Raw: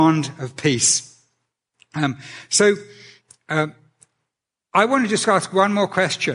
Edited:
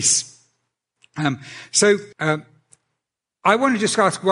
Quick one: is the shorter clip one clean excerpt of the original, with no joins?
no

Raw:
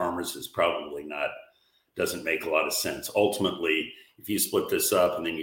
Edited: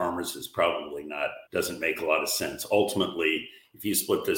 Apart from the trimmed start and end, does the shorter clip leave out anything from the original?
yes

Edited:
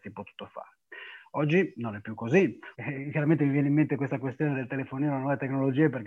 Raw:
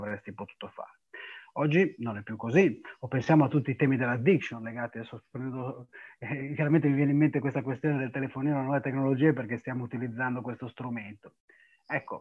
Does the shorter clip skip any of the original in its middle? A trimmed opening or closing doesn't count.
yes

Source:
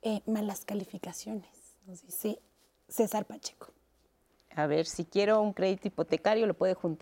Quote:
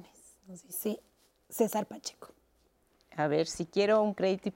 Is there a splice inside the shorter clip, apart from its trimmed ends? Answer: no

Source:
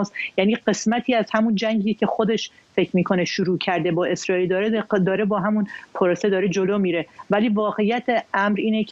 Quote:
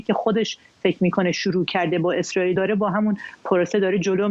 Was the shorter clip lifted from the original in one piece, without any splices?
no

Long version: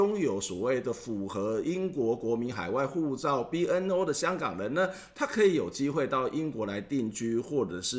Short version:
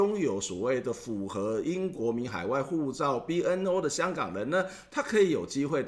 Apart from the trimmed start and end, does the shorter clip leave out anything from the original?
yes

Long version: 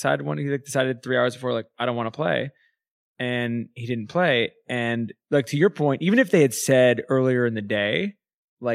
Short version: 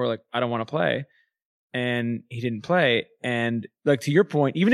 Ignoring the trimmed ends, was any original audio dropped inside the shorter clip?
no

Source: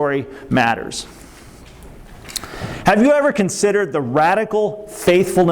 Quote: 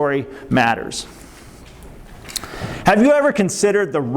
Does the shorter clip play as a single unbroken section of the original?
yes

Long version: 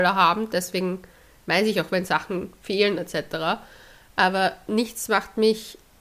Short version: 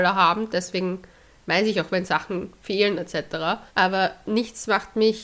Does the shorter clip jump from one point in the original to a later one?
yes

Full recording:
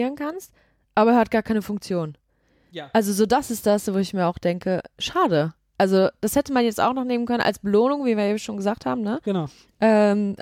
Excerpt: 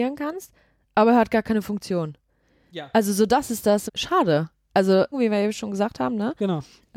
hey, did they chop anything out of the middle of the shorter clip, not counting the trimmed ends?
yes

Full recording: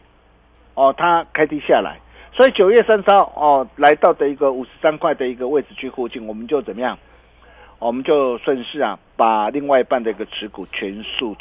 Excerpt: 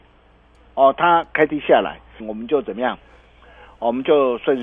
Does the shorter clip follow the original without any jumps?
no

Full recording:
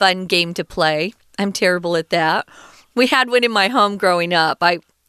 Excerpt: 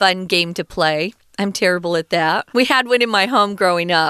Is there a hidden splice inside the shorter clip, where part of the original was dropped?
yes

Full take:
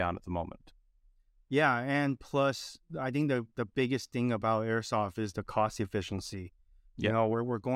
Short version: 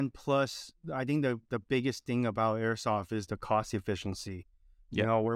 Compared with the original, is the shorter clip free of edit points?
yes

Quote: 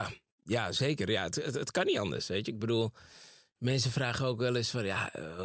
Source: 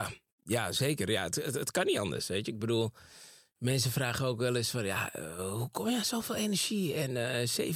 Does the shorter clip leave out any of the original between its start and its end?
no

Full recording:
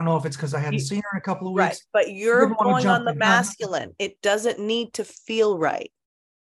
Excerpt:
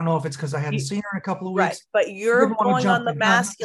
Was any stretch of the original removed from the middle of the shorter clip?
no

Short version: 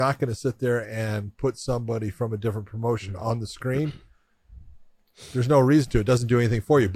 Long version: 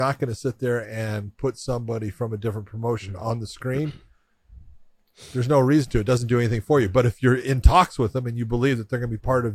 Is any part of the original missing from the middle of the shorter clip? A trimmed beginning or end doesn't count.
no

